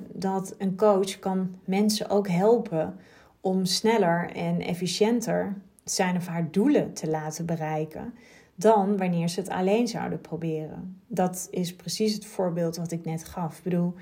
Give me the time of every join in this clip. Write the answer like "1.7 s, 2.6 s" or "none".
none